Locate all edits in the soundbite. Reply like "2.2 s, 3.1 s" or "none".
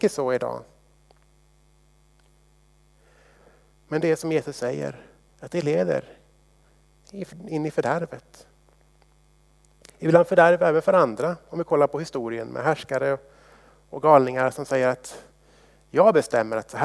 5.3 s

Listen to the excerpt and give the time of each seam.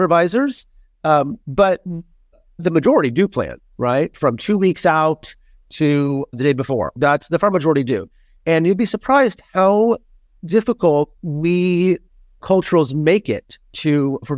none

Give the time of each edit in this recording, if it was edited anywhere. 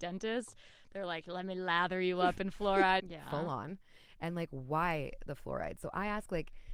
3.0 s

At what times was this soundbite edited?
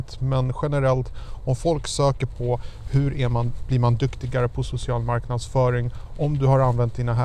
none

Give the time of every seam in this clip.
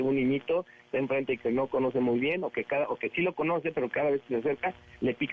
none

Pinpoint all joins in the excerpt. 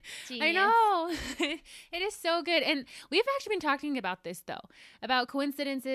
none

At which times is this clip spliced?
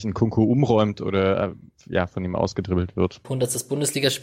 3.2 s

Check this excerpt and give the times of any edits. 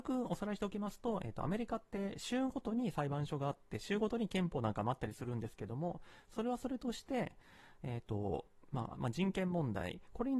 8.9 s

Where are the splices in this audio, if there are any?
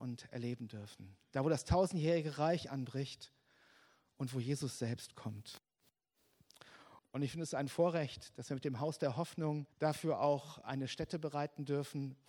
7.0 s, 9.7 s

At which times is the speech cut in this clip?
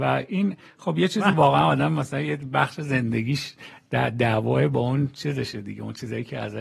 1.3 s

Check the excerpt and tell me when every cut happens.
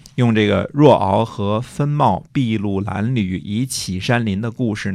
none

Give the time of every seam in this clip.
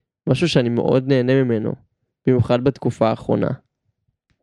none

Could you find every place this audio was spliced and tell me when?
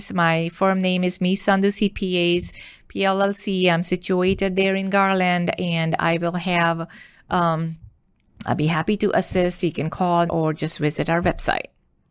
10.3 s

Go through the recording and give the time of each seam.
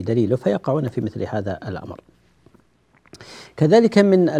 none

